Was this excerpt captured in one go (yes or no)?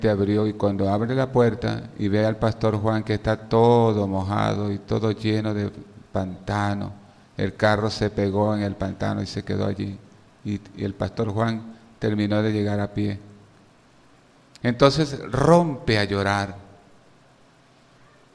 yes